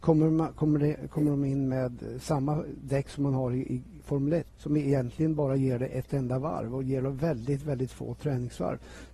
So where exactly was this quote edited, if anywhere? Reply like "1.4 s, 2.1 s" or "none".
4.5 s